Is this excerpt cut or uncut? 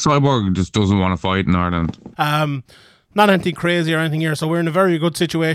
cut